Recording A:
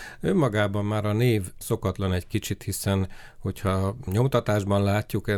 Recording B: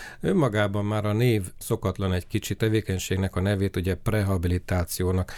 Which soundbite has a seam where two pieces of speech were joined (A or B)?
B